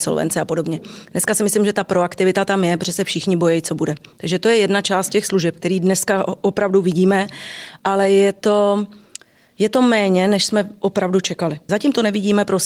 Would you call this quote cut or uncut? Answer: cut